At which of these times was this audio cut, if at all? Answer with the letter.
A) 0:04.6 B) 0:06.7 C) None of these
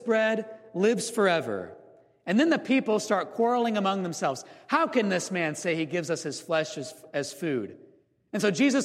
C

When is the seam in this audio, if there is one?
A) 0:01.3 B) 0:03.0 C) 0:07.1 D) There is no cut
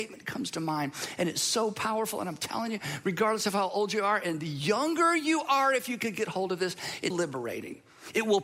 C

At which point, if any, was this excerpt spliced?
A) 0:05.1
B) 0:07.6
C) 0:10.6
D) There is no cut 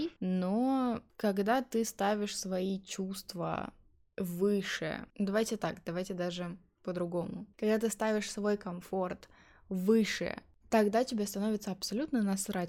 C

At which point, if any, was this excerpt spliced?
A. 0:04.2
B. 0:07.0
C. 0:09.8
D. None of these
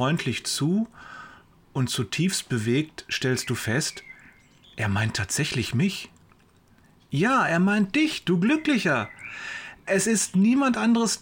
D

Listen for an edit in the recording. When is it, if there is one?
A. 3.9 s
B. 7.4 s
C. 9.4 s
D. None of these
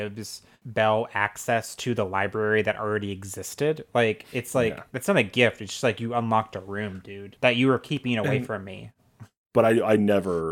C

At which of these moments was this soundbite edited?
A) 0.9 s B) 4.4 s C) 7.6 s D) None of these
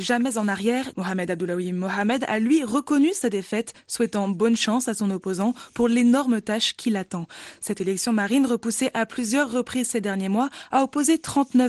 A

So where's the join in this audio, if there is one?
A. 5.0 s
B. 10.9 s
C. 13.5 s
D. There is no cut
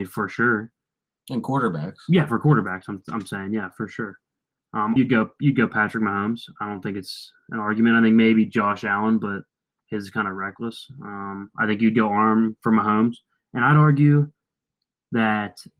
A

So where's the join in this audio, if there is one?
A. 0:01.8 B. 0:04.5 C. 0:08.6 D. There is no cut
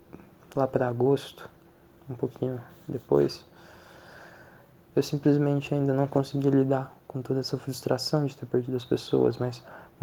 D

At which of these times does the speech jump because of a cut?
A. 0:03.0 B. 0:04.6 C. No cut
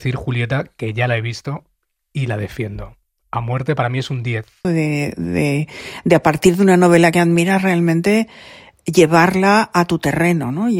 B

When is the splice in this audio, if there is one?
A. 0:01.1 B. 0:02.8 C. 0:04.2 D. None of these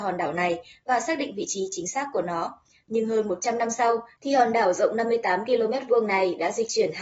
C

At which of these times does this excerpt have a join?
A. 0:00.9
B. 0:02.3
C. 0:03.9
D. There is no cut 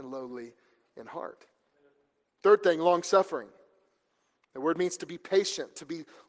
B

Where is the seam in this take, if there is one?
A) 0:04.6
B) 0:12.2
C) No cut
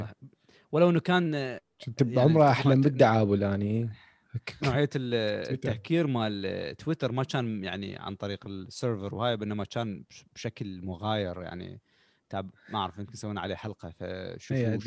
A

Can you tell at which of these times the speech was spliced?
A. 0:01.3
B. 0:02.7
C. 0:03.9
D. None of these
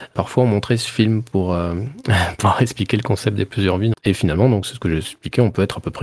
C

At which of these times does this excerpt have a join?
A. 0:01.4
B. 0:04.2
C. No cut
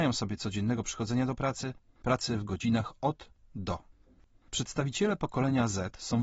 C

